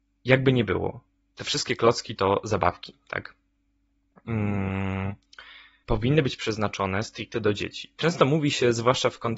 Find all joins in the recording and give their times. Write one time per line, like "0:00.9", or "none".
0:05.8
0:08.0